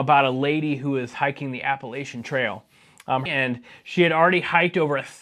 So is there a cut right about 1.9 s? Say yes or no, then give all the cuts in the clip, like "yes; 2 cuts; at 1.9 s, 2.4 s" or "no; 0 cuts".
no; 1 cut; at 3.3 s